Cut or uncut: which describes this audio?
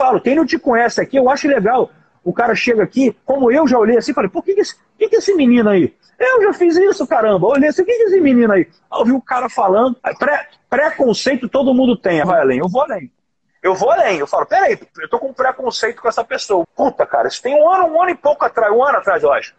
cut